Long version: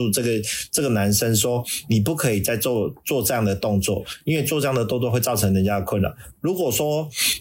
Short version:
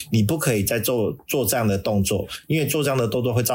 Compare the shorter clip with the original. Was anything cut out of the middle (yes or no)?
no